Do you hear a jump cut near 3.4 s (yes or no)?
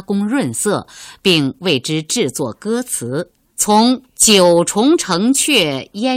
yes